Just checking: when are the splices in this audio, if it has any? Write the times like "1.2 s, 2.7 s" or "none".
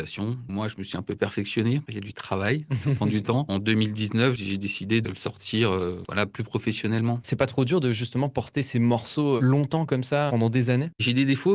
10.3 s